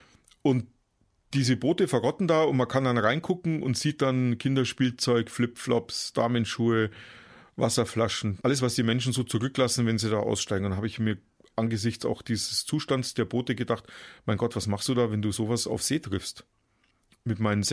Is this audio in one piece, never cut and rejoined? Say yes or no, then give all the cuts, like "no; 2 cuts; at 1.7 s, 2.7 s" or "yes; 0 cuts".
no; 1 cut; at 8.4 s